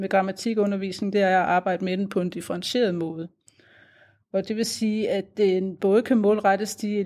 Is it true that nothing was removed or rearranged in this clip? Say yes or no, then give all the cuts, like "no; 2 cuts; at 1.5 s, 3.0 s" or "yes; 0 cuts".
yes; 0 cuts